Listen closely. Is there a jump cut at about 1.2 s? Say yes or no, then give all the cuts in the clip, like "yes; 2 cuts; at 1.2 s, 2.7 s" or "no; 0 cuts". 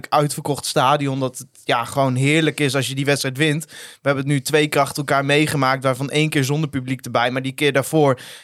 no; 0 cuts